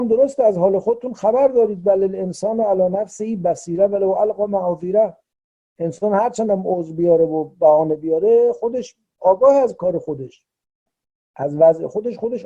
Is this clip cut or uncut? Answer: uncut